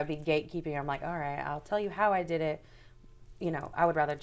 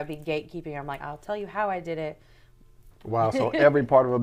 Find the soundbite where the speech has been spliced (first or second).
second